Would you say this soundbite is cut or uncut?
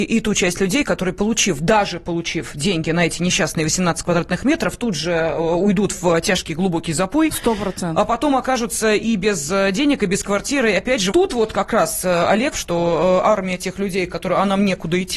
cut